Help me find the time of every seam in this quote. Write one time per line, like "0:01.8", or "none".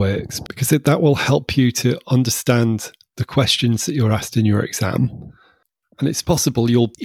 none